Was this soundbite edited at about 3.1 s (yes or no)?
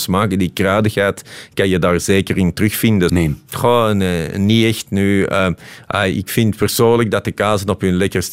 yes